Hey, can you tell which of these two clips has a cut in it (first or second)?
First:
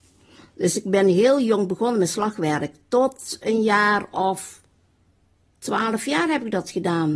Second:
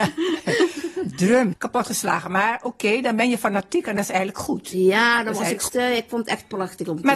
second